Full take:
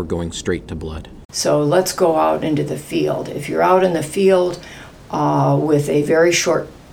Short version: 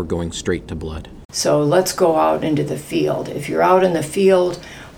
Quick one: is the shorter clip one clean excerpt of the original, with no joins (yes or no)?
yes